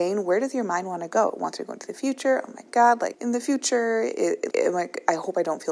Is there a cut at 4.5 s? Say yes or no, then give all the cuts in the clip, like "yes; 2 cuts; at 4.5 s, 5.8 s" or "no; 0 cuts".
yes; 2 cuts; at 3.1 s, 4.5 s